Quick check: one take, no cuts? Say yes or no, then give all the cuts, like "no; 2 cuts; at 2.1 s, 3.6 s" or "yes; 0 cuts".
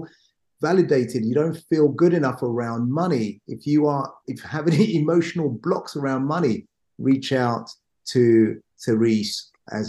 yes; 0 cuts